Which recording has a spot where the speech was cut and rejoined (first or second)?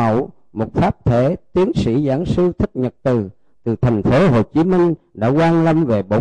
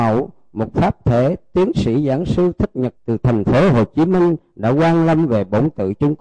second